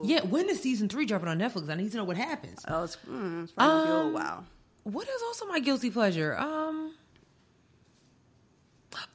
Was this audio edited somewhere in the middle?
no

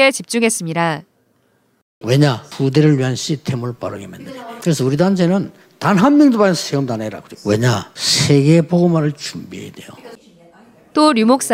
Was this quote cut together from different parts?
yes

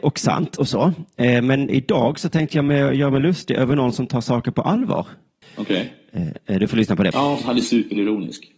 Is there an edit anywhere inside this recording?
yes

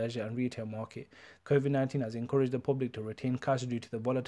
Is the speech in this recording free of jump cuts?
no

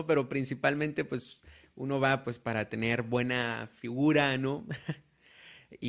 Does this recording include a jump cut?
no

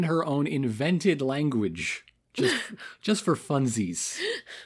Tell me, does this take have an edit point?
no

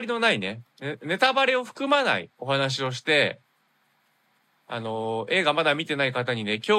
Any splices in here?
no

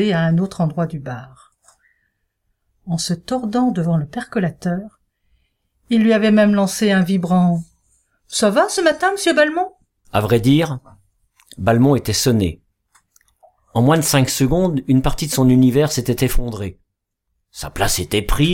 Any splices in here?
yes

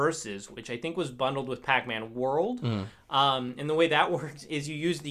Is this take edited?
no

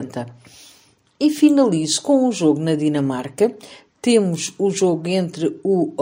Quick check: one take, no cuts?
yes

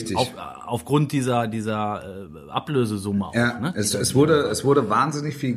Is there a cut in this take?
no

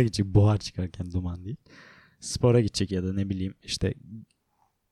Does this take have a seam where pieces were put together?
yes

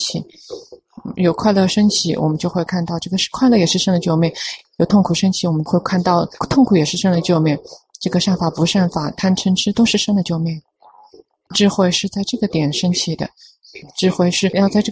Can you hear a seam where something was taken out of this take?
no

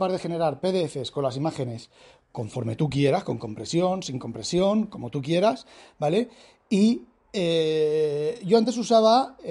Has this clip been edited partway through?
no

